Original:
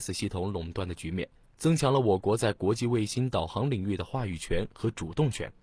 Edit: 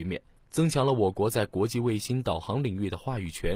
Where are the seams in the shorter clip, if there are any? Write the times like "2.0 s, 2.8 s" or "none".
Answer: none